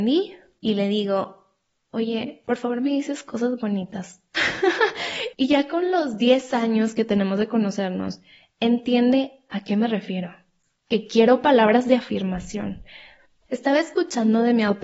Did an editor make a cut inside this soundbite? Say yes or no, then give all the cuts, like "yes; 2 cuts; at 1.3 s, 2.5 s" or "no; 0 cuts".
no; 0 cuts